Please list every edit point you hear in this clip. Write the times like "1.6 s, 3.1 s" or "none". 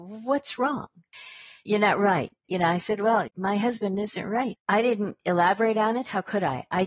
3.3 s, 4.5 s